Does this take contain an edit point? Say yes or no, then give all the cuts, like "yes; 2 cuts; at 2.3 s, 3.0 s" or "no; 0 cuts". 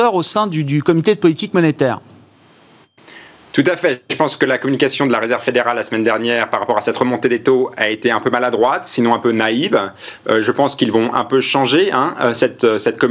no; 0 cuts